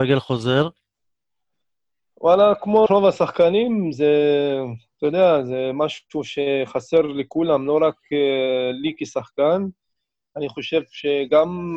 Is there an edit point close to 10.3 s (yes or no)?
no